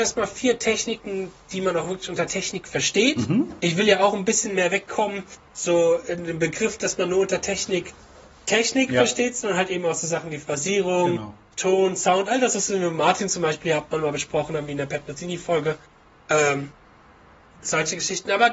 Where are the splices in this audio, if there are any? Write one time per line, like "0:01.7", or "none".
none